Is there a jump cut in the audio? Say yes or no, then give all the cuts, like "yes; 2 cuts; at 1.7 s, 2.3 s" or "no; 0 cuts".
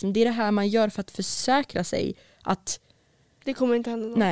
no; 0 cuts